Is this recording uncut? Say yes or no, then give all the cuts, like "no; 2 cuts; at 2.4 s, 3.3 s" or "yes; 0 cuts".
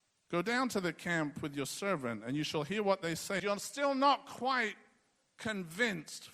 no; 1 cut; at 3.4 s